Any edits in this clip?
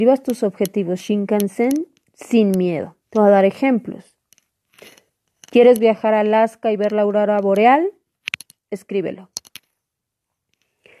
yes; 1 cut; at 3.0 s

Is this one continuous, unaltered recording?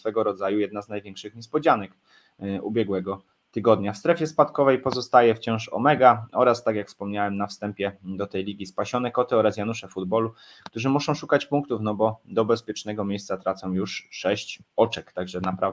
yes; 0 cuts

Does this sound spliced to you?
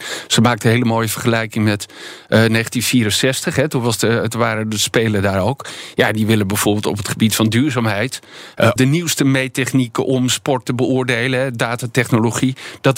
yes; 1 cut; at 8.8 s

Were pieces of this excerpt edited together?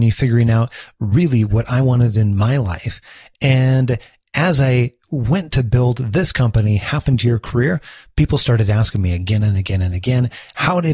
no; 0 cuts

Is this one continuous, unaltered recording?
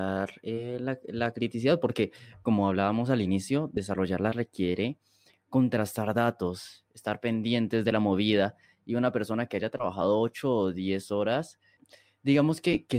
yes; 0 cuts

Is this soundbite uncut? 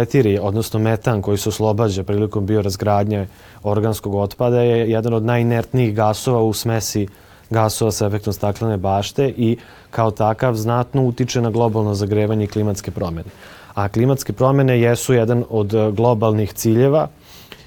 yes; 0 cuts

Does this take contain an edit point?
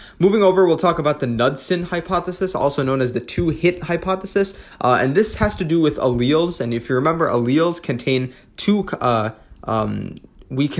no; 0 cuts

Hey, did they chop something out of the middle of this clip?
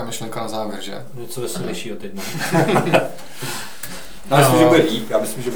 no; 0 cuts

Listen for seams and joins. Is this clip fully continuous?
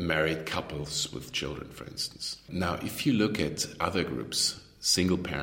yes; 0 cuts

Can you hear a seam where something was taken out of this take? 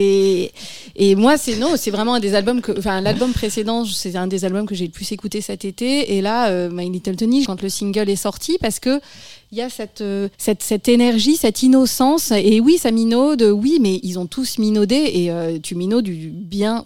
yes; 2 cuts; at 7.5 s, 10.3 s

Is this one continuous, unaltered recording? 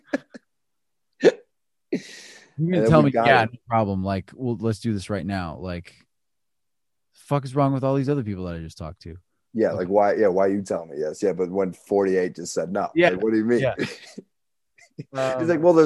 yes; 0 cuts

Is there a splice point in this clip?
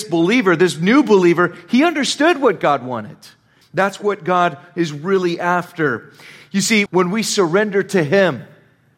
yes; 2 cuts; at 3.6 s, 6.9 s

